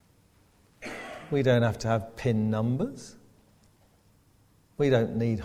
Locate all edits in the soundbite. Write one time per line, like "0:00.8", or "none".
none